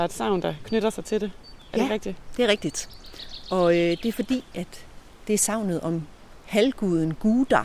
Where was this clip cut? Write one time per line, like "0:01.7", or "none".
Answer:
none